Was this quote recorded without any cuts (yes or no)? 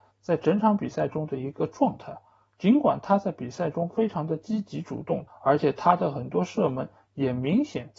no